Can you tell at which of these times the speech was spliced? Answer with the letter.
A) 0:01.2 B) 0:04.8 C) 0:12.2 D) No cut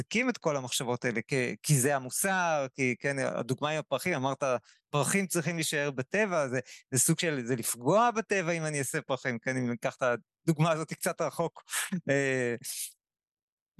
A